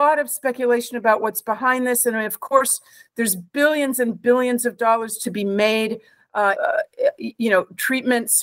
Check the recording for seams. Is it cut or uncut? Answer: cut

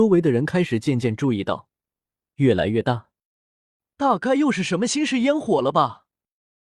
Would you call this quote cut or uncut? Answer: cut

